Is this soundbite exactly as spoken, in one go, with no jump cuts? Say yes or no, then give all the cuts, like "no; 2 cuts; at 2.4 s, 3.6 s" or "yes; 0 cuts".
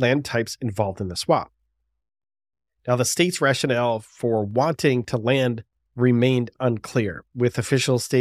yes; 0 cuts